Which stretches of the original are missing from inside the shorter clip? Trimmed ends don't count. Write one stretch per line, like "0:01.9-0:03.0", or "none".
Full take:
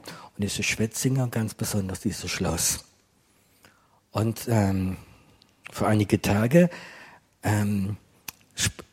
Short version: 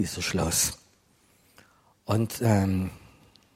none